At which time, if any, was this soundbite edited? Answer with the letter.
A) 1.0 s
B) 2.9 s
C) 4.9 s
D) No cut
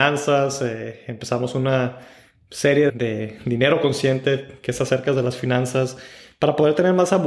B